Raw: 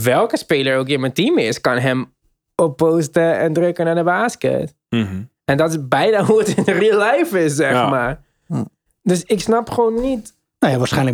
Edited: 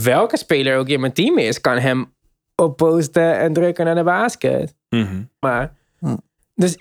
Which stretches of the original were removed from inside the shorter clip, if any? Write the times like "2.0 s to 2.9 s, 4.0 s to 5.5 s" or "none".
5.4 s to 7.9 s